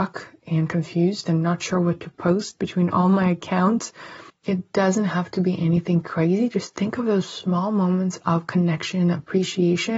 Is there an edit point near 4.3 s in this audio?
yes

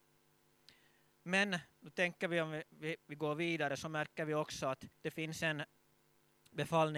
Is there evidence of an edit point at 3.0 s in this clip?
yes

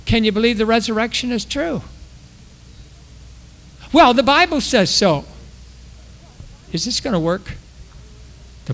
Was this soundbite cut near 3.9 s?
no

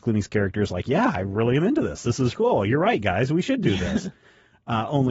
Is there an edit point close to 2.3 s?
yes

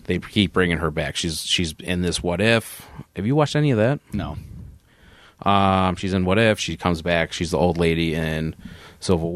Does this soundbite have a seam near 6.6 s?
yes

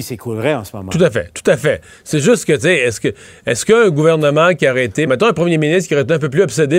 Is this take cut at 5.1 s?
yes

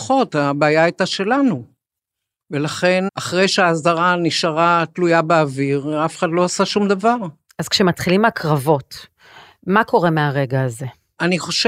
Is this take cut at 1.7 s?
no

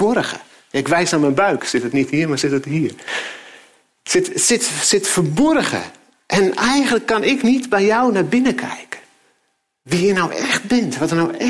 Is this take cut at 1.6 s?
yes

